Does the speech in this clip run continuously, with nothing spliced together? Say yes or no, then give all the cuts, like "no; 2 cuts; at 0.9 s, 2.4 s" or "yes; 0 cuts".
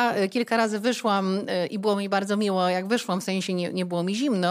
yes; 0 cuts